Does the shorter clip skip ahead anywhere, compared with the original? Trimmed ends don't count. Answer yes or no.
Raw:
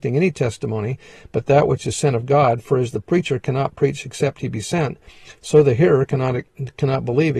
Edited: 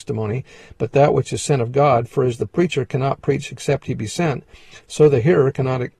no